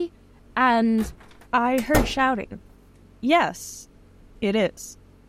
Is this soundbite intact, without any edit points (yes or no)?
no